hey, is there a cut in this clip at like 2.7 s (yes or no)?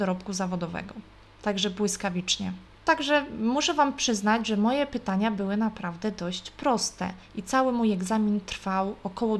yes